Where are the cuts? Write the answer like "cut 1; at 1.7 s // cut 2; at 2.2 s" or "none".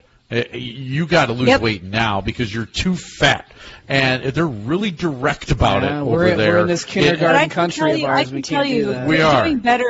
none